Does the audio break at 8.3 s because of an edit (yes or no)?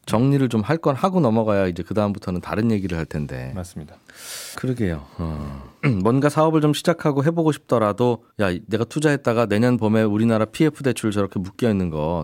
yes